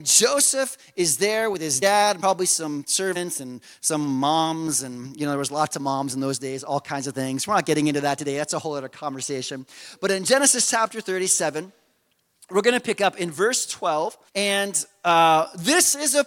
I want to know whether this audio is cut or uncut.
cut